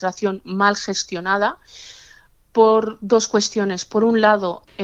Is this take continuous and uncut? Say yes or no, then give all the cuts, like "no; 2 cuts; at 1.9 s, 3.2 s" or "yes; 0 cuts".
yes; 0 cuts